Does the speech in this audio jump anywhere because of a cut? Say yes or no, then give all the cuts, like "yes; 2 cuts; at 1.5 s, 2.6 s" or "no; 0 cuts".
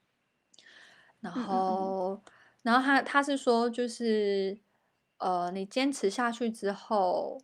no; 0 cuts